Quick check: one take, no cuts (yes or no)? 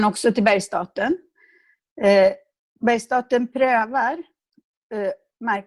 yes